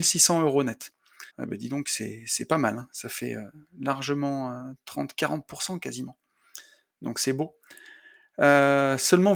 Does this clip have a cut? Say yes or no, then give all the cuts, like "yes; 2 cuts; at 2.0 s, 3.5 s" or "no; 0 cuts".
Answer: yes; 1 cut; at 1.3 s